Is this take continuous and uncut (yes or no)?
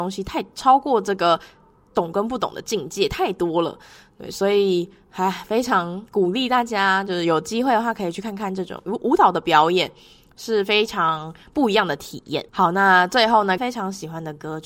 no